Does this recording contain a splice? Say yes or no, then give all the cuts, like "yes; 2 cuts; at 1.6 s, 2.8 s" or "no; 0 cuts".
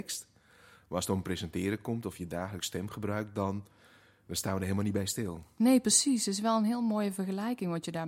no; 0 cuts